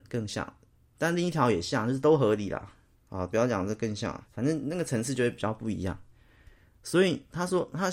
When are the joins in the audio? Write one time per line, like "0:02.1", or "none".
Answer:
0:04.3